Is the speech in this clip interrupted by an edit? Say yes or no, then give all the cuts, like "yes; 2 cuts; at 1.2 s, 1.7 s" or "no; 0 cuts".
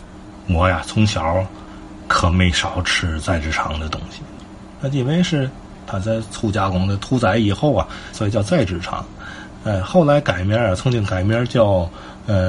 yes; 2 cuts; at 5.9 s, 8.1 s